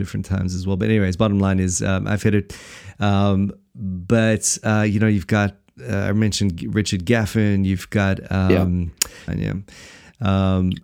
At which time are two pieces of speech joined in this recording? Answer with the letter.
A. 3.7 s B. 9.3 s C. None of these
B